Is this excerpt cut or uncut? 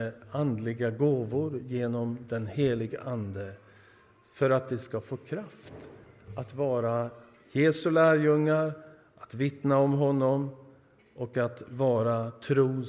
uncut